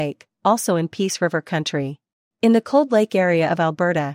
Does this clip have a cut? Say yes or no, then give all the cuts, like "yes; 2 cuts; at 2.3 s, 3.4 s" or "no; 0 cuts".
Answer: yes; 1 cut; at 2.3 s